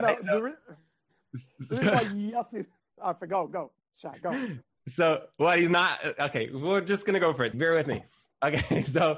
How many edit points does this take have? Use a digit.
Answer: 1